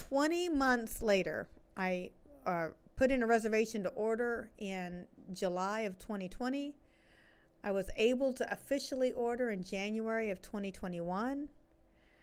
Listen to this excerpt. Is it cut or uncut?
uncut